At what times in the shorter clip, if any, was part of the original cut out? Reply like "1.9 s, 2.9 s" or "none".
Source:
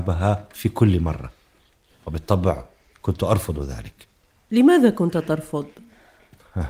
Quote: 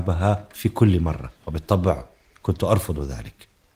1.4 s